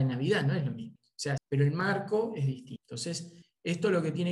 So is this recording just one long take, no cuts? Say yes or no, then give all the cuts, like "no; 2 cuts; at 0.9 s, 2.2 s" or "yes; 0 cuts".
no; 1 cut; at 1.4 s